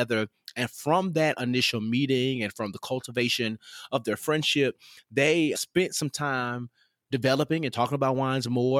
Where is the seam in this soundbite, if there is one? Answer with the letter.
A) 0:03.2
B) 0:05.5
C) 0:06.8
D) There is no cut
B